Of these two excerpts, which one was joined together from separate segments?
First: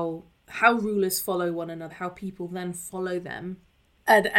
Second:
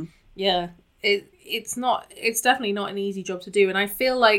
first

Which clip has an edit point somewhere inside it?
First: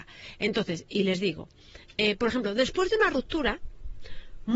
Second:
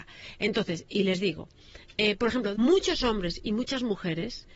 second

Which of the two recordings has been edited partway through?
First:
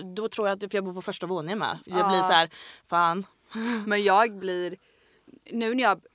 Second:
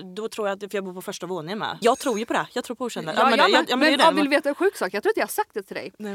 second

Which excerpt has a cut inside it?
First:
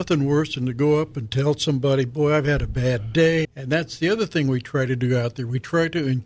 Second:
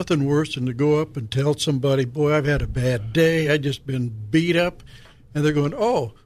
first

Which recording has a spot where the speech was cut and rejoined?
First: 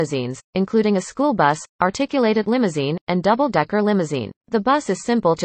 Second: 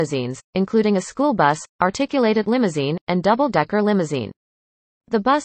first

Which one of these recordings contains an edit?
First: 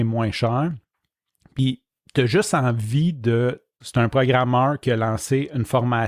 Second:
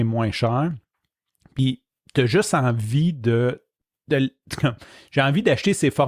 first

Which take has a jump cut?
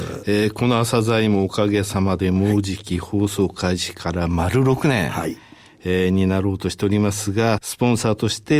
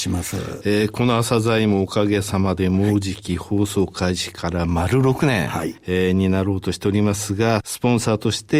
second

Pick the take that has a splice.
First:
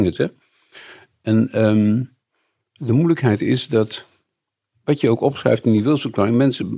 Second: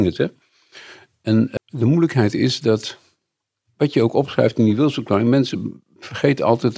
second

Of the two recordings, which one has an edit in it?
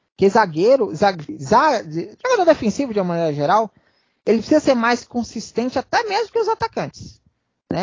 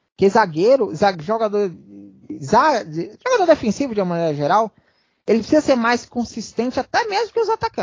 first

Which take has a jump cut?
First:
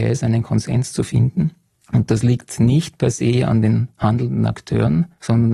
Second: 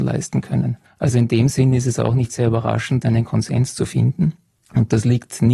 second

